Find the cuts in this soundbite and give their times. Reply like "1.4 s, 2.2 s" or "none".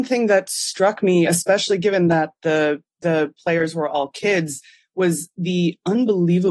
none